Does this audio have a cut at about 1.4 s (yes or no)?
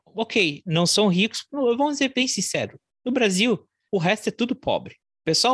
no